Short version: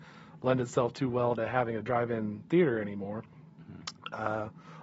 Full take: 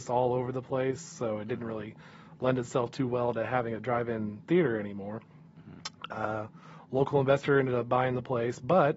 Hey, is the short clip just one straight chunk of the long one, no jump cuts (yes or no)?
yes